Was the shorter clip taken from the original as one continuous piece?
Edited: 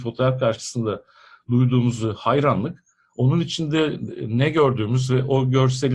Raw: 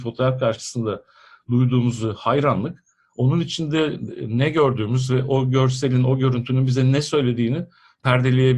yes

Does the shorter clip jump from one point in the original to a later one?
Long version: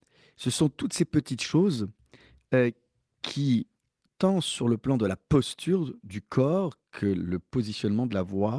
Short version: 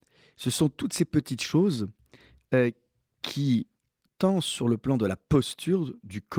no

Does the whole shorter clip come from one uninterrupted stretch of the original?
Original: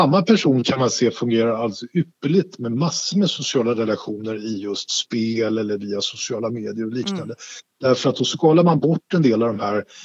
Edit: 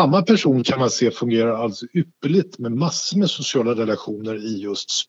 yes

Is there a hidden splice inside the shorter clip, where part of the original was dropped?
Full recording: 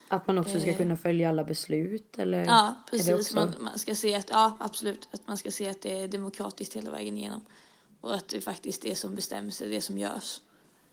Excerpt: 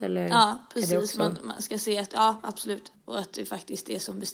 yes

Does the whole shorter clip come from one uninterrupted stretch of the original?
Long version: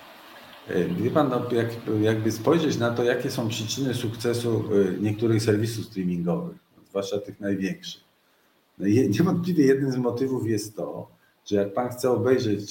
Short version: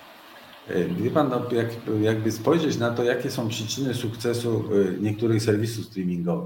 yes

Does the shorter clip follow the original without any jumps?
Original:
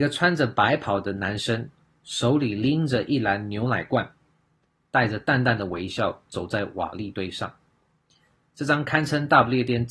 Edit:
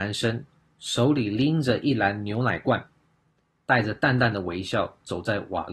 yes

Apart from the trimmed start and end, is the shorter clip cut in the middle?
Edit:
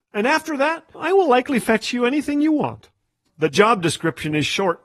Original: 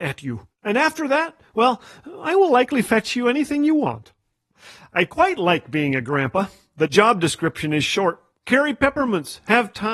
yes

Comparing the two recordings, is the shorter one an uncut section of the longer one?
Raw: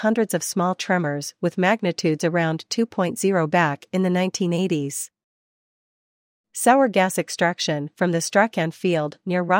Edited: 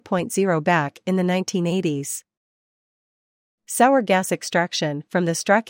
yes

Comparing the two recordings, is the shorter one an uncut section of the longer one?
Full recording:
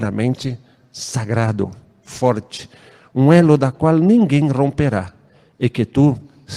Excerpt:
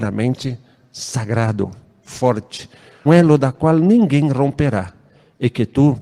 no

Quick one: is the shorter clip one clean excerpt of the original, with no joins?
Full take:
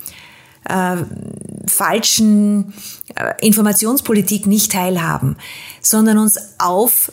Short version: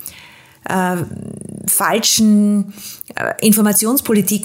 yes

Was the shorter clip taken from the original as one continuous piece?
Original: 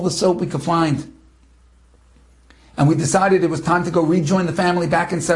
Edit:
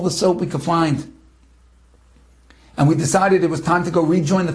yes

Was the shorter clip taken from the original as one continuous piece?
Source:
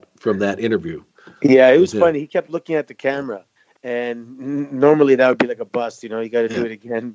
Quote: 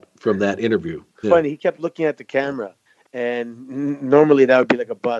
no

